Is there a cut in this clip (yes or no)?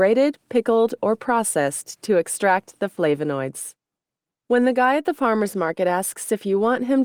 yes